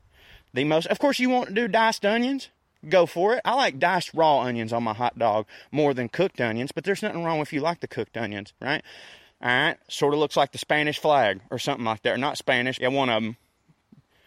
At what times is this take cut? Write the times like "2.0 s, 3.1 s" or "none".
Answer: 9.3 s, 12.8 s